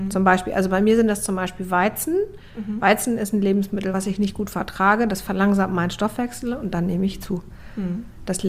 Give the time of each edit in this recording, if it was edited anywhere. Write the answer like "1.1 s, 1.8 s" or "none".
none